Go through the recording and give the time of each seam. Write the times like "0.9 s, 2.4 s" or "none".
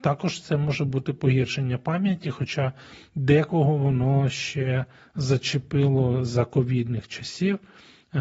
none